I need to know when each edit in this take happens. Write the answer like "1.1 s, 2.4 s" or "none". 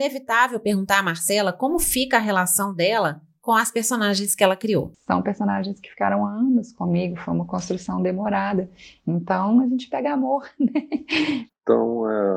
11.5 s